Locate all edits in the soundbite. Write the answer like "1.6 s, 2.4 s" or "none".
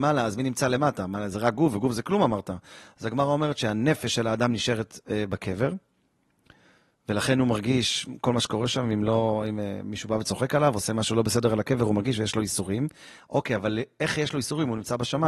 none